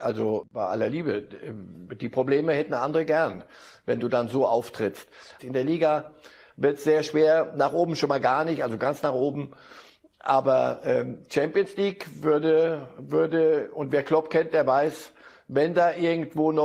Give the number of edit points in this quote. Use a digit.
1